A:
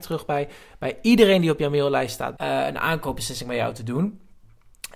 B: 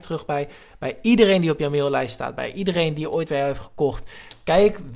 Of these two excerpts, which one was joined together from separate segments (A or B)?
A